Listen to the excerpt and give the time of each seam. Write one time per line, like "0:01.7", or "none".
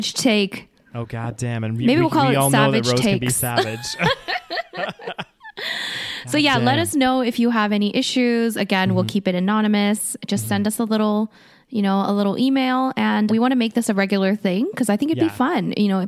0:13.3

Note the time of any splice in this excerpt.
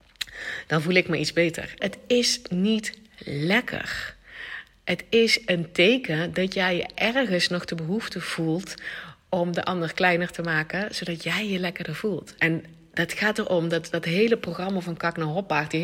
0:01.8
0:12.4

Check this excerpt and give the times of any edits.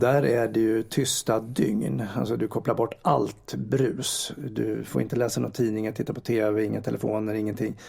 none

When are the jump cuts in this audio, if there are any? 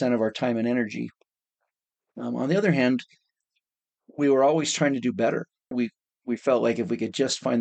0:05.7

